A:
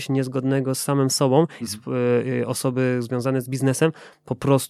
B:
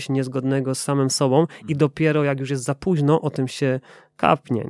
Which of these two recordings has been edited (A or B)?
A